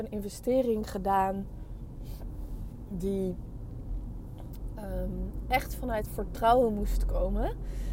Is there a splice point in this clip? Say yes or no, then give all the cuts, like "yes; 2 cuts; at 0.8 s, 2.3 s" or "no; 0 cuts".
no; 0 cuts